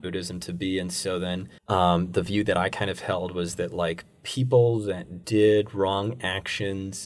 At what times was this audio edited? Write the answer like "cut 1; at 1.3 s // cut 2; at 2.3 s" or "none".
cut 1; at 1.6 s